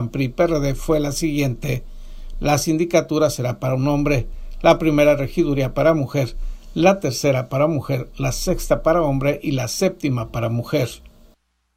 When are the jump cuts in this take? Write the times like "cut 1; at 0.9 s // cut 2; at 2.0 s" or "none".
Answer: cut 1; at 2.3 s